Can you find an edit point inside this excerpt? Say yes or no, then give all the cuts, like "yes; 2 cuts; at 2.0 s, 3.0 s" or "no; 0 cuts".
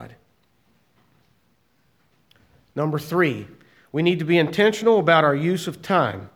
no; 0 cuts